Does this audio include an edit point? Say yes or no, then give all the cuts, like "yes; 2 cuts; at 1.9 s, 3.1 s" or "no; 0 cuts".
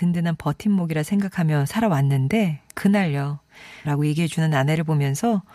yes; 1 cut; at 3.8 s